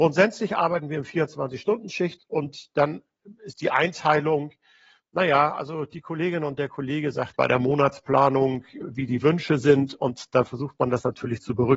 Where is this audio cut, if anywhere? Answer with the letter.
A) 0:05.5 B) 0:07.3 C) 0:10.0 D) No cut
B